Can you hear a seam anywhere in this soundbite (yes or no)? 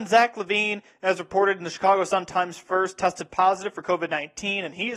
no